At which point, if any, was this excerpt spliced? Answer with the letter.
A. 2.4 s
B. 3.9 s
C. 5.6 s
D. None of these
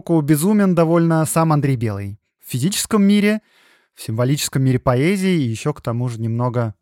A